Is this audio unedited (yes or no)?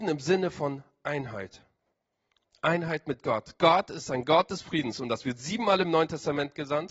yes